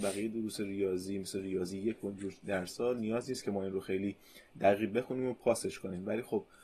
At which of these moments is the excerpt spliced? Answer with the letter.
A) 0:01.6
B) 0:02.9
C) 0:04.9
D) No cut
C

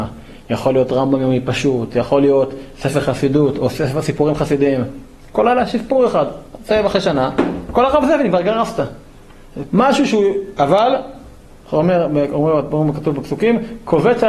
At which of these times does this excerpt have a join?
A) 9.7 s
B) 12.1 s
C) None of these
A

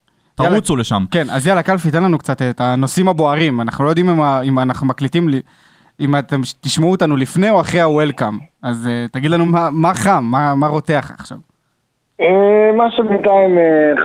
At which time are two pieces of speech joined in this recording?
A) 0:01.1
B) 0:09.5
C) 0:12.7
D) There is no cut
B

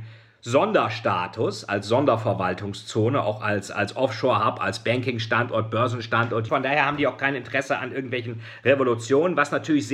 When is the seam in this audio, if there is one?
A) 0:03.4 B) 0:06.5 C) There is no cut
B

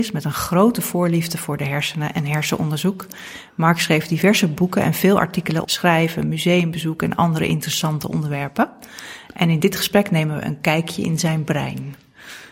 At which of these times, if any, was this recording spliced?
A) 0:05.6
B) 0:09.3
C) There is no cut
A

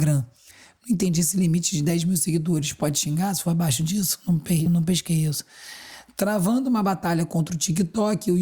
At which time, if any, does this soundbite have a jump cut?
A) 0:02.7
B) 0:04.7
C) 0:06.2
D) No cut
B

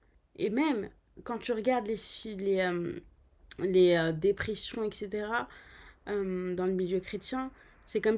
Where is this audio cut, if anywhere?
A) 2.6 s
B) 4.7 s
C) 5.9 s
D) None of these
D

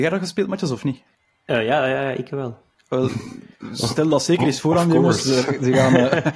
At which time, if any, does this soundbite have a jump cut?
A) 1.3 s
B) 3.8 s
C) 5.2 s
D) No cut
D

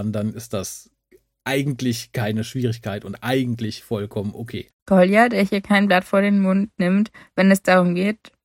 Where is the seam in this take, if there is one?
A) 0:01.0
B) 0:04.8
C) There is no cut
B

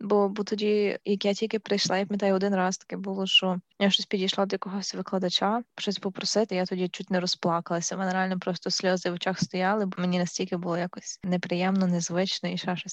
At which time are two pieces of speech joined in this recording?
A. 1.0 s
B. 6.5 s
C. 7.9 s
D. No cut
B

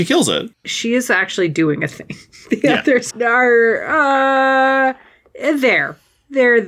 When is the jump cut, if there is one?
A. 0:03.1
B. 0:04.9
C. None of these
A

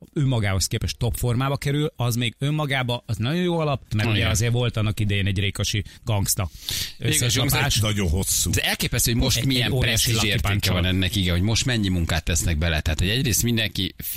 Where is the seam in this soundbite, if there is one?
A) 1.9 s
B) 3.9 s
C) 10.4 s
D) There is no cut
B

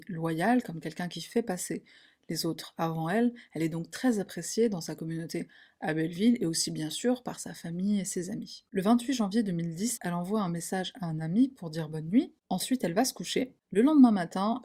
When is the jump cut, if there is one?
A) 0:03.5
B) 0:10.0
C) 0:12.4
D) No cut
B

